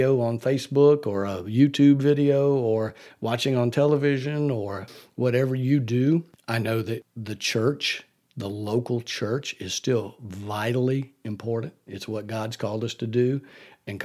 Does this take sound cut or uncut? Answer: cut